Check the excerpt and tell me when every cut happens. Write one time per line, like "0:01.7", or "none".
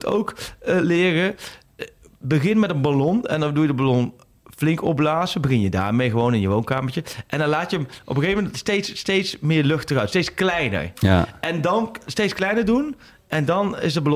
none